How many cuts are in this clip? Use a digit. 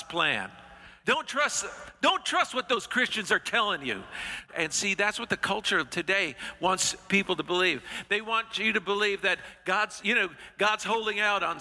3